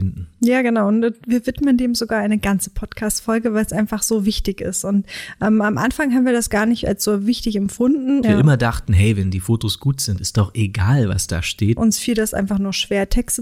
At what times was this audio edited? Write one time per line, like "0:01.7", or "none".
0:08.2
0:11.8